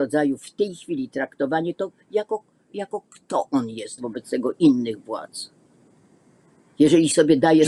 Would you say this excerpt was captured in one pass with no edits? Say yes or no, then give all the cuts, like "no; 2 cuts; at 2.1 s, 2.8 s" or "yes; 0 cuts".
no; 1 cut; at 4.0 s